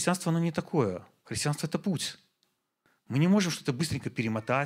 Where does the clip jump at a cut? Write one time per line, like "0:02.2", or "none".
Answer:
none